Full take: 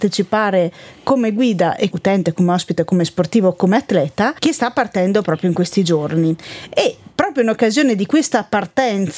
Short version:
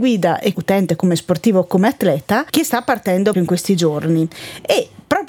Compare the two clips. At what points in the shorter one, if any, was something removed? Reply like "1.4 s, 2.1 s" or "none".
1.0 s, 3.3 s